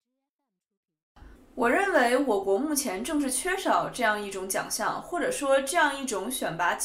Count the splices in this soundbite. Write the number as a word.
one